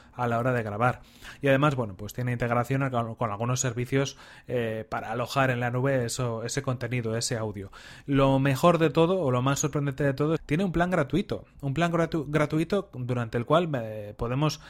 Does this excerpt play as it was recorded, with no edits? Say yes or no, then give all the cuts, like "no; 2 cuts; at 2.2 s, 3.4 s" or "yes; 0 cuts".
no; 1 cut; at 10.4 s